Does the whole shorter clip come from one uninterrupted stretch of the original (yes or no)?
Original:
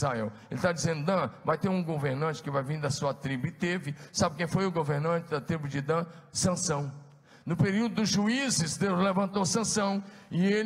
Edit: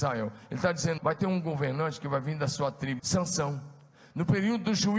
no